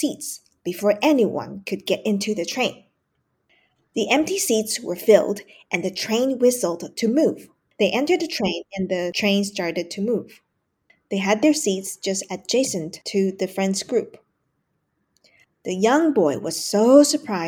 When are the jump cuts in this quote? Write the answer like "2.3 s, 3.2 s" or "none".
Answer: 7.7 s